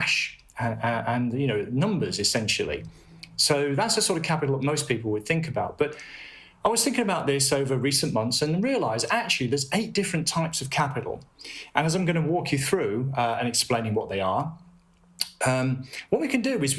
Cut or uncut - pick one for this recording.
uncut